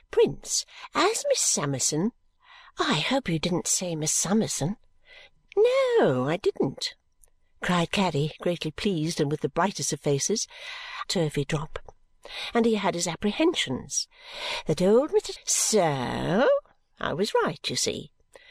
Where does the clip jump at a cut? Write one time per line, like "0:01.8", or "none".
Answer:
0:11.1
0:15.4